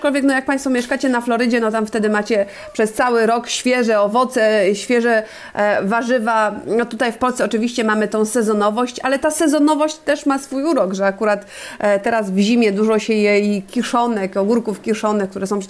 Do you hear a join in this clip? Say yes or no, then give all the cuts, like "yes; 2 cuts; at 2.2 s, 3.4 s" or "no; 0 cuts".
no; 0 cuts